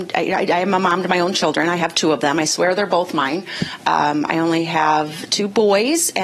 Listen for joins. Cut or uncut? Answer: uncut